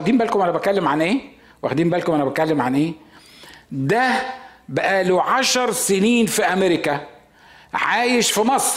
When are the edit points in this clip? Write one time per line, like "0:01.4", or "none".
none